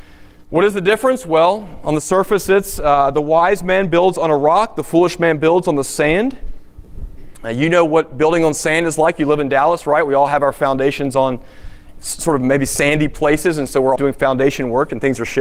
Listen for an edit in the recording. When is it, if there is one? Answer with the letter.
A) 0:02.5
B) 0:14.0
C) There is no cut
B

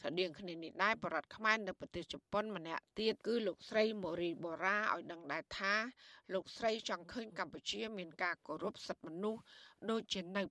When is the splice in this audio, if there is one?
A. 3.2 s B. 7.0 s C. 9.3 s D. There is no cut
A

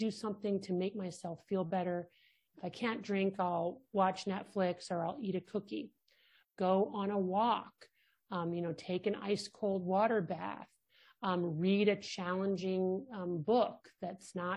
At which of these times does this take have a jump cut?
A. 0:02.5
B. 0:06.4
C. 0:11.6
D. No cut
B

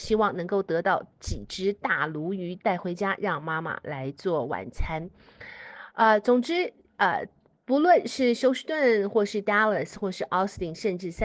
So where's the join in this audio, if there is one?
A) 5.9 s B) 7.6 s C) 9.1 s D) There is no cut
D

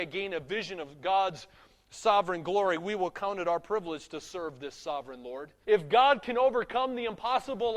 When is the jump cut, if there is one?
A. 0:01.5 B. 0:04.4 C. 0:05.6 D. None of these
C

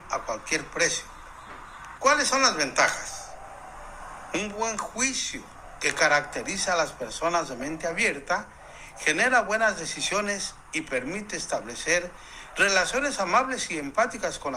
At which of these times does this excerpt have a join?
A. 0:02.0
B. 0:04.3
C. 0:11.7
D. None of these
A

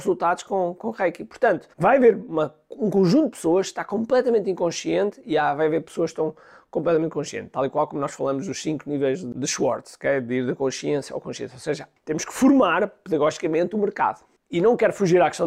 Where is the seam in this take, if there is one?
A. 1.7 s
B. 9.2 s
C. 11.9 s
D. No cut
A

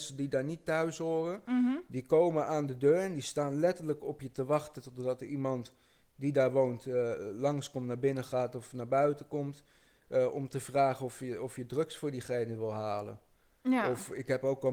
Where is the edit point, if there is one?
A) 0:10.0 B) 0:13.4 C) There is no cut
C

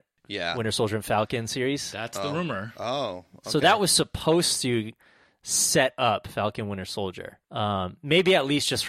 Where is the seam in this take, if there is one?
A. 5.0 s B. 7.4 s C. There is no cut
B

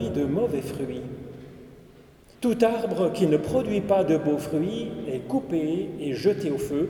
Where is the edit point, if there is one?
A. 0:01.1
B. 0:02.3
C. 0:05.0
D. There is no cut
B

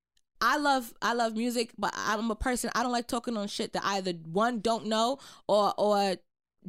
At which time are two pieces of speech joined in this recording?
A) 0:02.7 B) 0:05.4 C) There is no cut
C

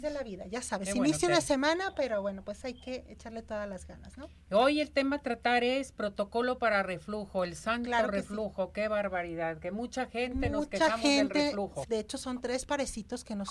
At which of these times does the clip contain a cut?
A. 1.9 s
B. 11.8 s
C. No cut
B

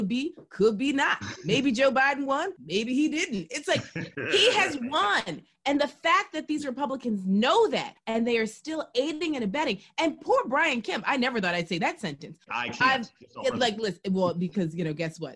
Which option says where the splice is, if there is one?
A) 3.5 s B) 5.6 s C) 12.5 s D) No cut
C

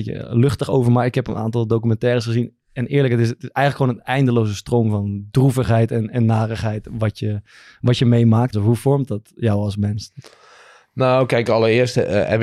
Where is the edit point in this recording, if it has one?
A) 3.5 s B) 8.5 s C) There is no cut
B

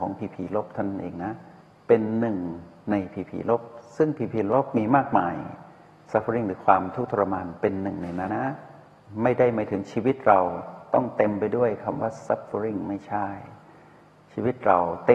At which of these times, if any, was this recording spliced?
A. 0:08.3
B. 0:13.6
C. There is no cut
A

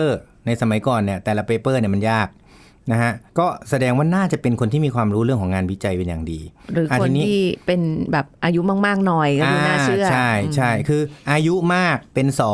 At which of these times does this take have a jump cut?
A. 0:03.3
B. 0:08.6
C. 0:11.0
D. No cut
A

